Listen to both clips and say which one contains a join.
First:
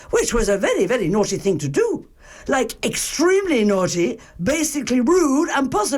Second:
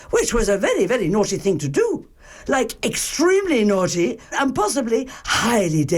second; 1 cut; at 4.3 s

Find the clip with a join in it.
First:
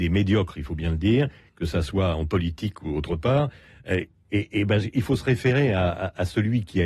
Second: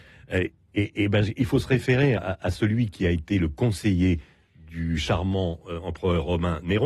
second; 1 cut; at 2.2 s

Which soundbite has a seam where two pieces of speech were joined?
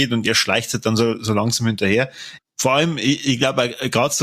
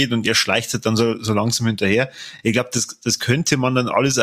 first; 1 cut; at 2.4 s

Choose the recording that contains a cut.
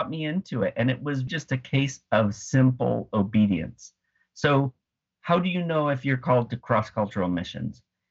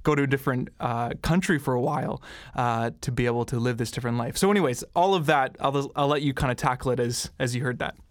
first; 1 cut; at 1.3 s

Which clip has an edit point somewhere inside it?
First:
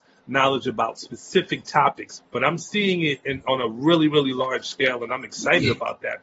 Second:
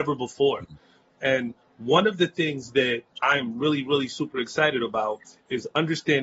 first; 1 cut; at 2.2 s

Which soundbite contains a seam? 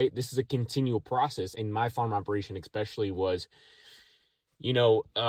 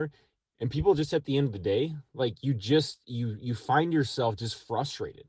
first; 1 cut; at 1.5 s

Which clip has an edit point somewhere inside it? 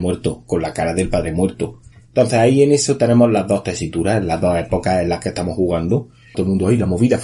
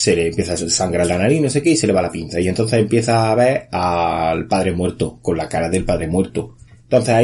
first; 1 cut; at 6.3 s

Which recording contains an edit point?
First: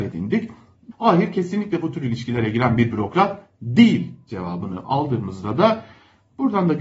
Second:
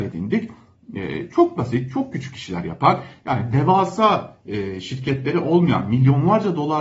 first; 1 cut; at 0.9 s

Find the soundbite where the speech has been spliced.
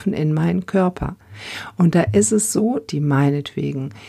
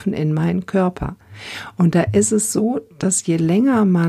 first; 1 cut; at 2.9 s

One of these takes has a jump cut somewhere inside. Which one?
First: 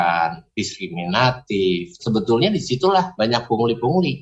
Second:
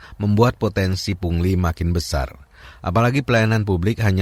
first; 1 cut; at 2.0 s

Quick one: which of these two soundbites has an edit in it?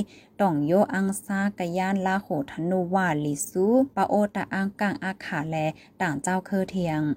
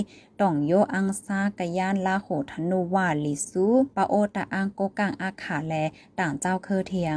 first; 1 cut; at 4.7 s

